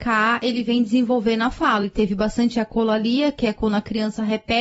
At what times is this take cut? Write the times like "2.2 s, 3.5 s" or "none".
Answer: none